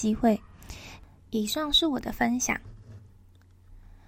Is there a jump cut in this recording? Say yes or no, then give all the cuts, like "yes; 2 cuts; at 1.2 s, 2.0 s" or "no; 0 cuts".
yes; 1 cut; at 1.2 s